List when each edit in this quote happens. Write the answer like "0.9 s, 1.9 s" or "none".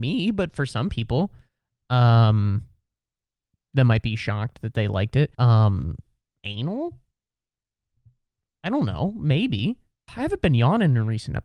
5.3 s, 10.1 s